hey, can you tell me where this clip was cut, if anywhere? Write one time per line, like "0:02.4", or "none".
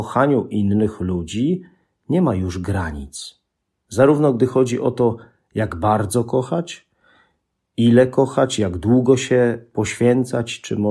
none